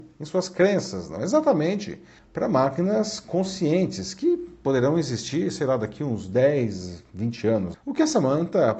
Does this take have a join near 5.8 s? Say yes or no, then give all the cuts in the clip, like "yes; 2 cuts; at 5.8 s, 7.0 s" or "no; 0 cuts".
no; 2 cuts; at 2.2 s, 7.7 s